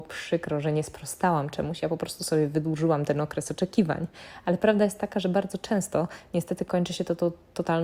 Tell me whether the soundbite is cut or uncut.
uncut